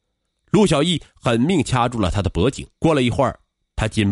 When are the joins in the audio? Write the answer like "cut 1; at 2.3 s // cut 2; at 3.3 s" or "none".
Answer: cut 1; at 2.8 s